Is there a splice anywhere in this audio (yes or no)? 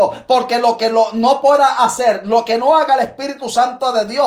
no